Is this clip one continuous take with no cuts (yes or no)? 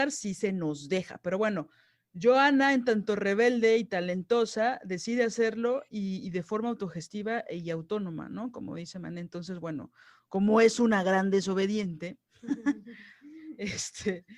yes